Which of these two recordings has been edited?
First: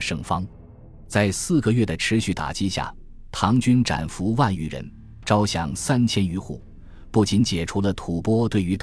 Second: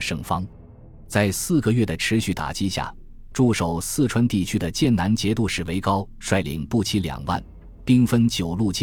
second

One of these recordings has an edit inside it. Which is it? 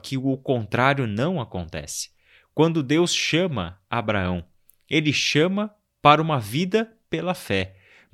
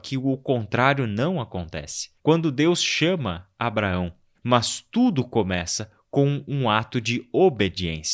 second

